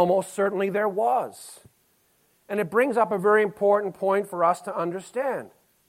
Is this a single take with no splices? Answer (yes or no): yes